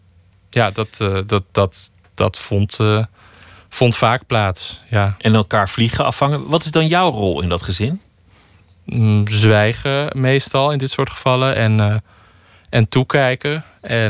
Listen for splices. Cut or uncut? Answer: uncut